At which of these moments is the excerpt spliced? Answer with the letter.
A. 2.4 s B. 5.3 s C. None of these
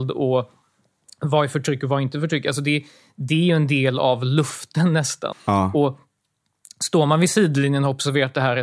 B